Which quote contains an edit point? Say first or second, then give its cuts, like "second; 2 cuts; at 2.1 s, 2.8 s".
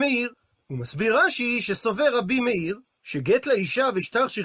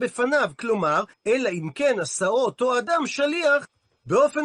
second; 1 cut; at 1.1 s